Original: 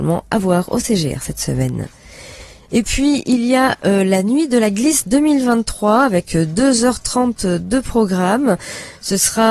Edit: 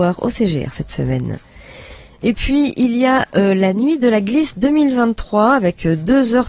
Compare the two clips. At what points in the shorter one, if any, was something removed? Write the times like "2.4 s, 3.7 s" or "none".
none